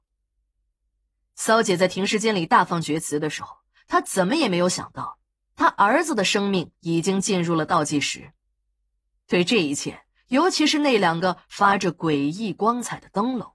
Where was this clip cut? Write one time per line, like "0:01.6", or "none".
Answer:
0:10.1